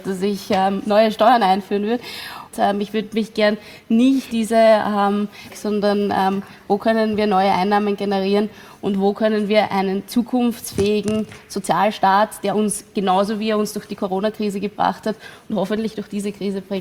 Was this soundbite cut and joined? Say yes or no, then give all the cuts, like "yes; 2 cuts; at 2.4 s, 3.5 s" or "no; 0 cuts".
yes; 3 cuts; at 2.5 s, 4.3 s, 5.5 s